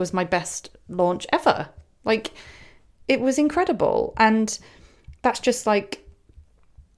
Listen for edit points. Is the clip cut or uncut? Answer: uncut